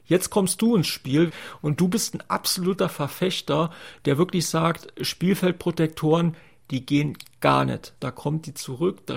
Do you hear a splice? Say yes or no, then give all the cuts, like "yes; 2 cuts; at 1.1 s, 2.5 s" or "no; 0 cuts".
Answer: yes; 2 cuts; at 1.3 s, 8.0 s